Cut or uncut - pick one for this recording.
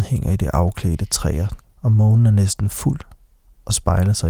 cut